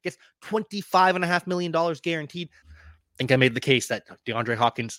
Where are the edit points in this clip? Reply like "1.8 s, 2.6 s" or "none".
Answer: 2.6 s